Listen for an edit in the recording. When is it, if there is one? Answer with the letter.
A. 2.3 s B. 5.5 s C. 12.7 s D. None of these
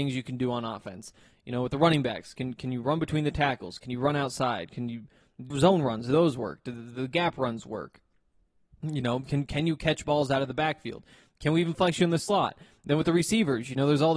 B